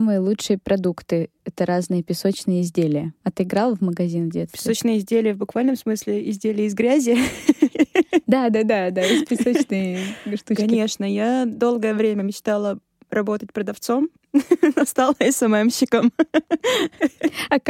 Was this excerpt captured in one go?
no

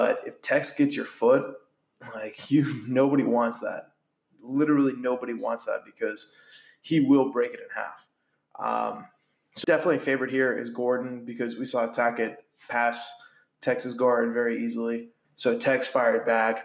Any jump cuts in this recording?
yes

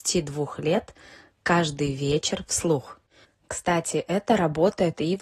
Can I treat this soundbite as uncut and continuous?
no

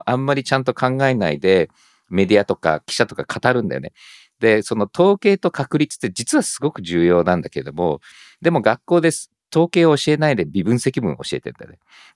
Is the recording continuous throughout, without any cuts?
yes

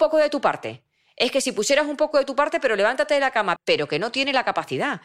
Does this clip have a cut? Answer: yes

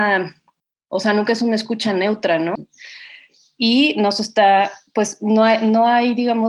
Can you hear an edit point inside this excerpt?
yes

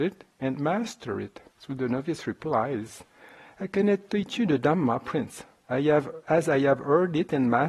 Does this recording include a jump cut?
yes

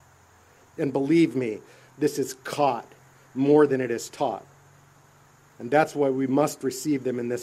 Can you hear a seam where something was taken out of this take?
no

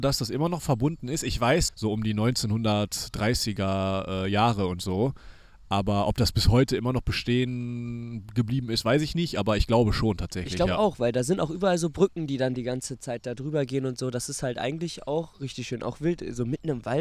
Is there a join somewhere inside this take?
yes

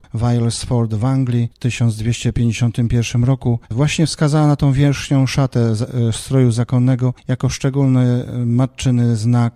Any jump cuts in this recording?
no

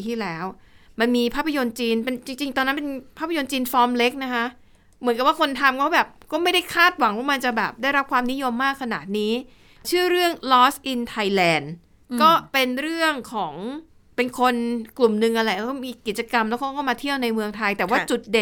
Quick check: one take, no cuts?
yes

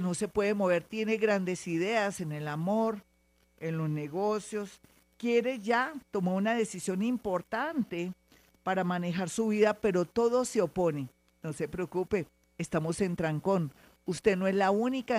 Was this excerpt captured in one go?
yes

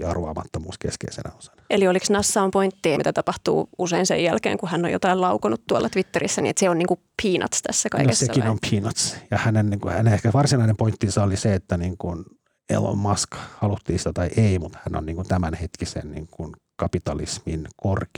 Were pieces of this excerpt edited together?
yes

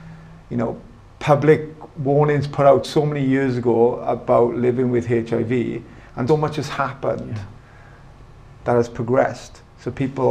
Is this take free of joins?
no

